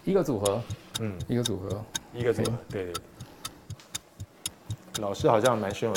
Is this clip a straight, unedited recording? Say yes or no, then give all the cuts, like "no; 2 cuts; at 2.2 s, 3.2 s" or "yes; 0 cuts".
yes; 0 cuts